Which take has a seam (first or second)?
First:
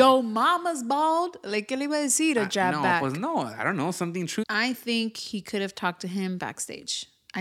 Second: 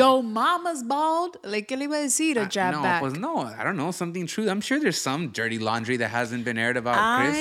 first